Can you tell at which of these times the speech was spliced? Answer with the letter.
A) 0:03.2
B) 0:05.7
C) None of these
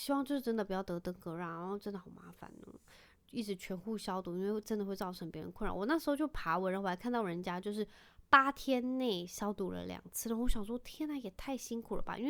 A